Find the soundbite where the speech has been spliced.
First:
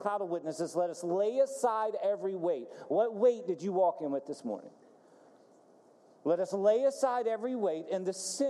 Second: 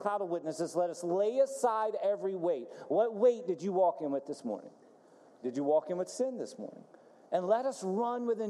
second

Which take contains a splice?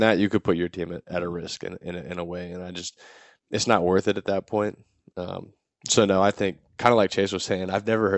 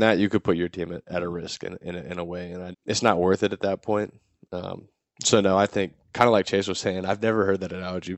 second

